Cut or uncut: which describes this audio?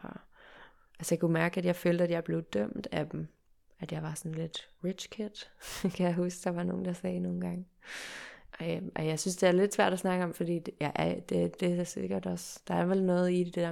uncut